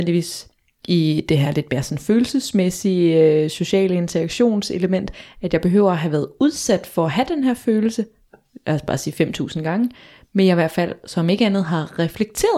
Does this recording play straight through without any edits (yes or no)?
yes